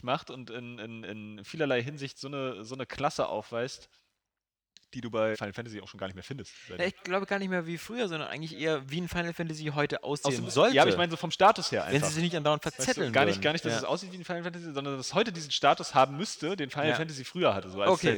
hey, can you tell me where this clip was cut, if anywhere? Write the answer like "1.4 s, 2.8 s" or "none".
5.3 s